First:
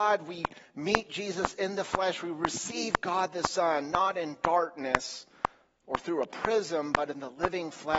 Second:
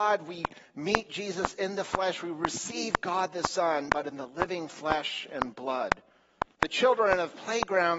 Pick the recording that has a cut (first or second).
second